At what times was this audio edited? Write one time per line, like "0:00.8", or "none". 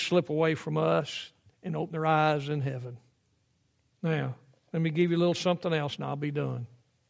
0:04.0